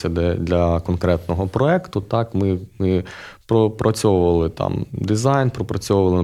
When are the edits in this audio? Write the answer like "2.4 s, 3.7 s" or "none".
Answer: none